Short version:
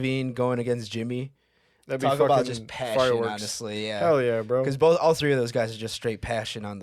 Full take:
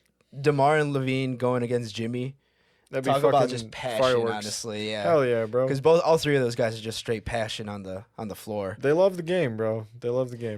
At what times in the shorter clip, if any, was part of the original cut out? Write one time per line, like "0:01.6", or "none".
none